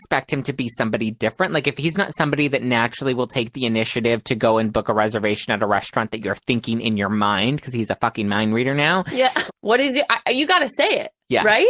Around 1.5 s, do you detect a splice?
no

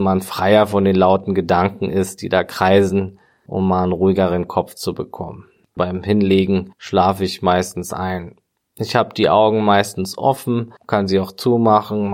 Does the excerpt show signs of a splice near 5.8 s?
yes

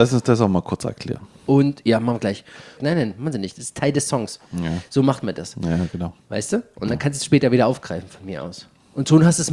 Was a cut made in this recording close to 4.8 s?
no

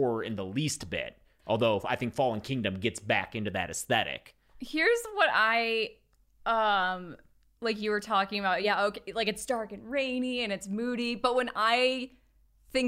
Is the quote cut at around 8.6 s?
no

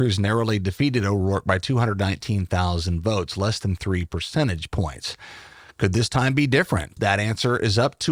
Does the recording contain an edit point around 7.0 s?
yes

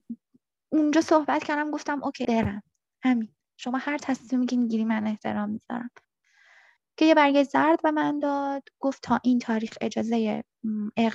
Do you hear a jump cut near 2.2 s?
yes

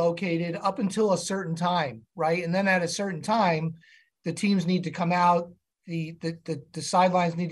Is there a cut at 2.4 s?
no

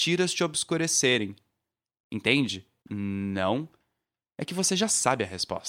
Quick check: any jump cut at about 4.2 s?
no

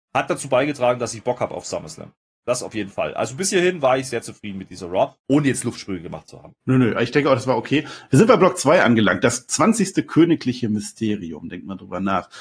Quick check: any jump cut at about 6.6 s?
yes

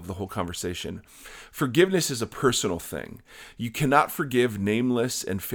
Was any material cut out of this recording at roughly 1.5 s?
no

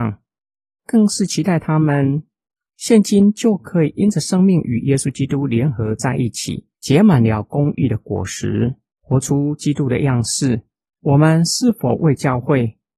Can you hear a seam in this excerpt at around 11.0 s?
yes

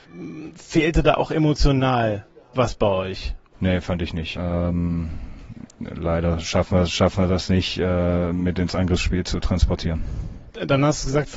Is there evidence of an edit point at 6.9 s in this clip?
no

